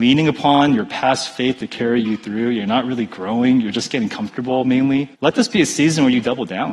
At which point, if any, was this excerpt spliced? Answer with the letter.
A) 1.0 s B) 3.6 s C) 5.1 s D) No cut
C